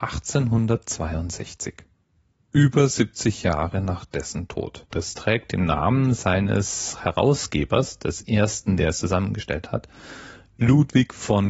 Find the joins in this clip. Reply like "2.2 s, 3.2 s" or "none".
4.9 s